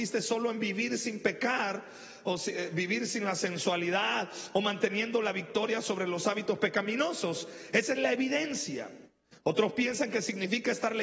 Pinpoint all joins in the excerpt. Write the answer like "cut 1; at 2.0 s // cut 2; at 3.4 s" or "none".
none

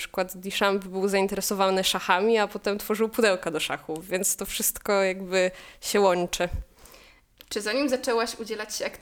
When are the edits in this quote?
none

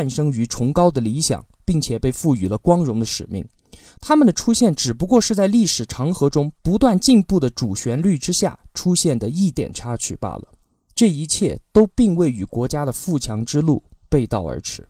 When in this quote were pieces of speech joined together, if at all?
cut 1; at 9.5 s

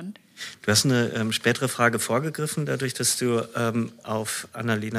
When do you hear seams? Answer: none

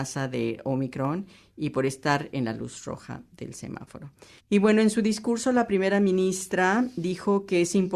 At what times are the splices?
cut 1; at 4.4 s

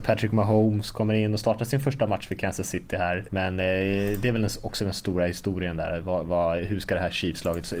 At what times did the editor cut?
cut 1; at 3.3 s

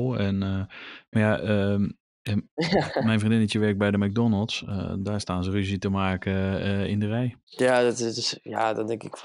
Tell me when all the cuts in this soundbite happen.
none

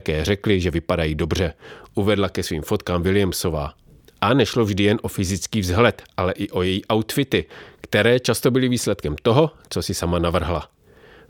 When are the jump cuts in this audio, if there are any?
none

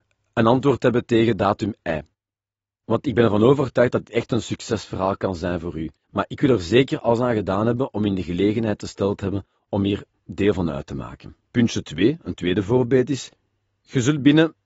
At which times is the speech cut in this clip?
cut 1; at 6.0 s

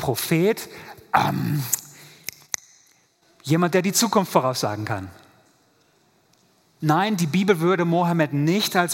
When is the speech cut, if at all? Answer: cut 1; at 6.8 s

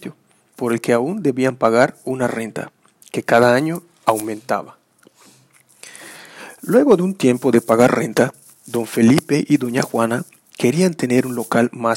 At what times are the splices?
none

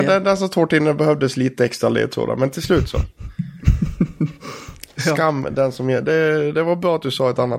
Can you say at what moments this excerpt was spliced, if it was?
none

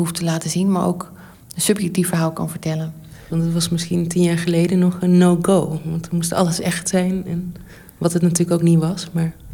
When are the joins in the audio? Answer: cut 1; at 3.3 s

